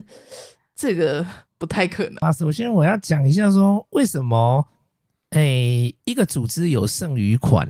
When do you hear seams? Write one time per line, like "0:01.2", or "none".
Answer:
0:02.2
0:06.0